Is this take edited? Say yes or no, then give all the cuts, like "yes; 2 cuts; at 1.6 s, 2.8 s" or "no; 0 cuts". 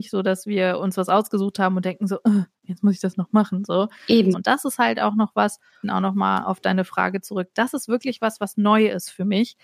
yes; 2 cuts; at 4.3 s, 5.8 s